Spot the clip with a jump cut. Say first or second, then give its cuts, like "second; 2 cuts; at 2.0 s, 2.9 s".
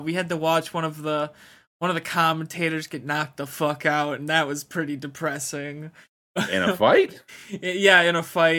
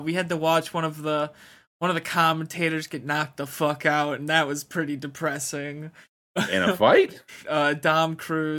second; 1 cut; at 7.4 s